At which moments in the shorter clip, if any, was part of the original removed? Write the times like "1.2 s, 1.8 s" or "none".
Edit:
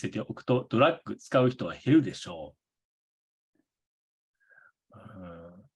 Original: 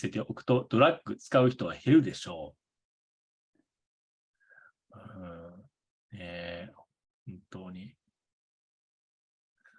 none